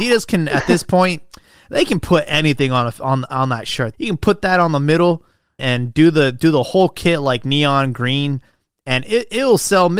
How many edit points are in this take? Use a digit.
2